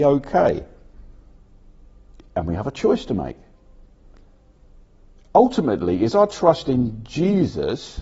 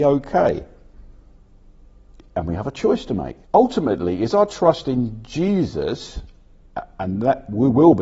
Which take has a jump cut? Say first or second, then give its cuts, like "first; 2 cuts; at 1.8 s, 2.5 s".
second; 1 cut; at 3.4 s